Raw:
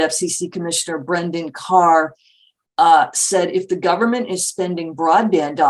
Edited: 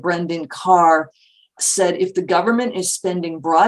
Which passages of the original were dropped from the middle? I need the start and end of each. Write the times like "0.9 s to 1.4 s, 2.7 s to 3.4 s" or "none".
2.6 s to 3.1 s